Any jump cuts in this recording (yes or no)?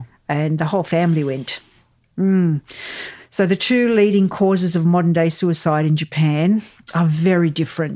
no